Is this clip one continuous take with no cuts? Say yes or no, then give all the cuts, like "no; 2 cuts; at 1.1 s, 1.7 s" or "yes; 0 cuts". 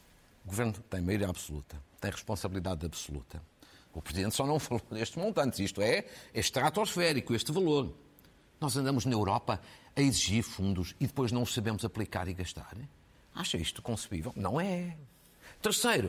no; 1 cut; at 3.9 s